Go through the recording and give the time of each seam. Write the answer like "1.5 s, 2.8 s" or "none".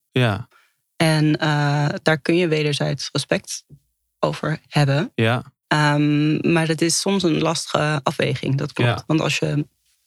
none